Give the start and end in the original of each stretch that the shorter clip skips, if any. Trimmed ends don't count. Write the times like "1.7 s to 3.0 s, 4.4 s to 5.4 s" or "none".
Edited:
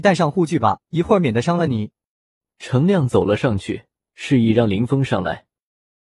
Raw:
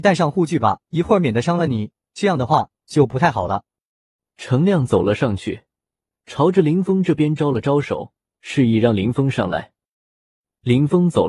2.0 s to 3.8 s, 5.8 s to 8.3 s